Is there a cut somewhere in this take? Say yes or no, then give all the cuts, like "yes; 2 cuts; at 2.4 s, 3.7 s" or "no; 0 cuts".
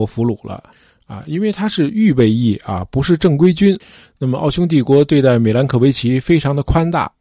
no; 0 cuts